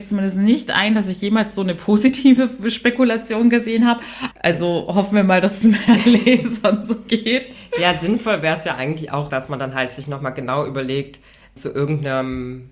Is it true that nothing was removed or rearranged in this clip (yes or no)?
no